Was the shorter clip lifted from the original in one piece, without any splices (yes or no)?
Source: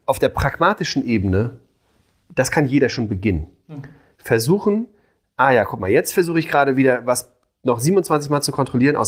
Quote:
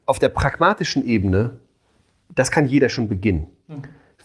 yes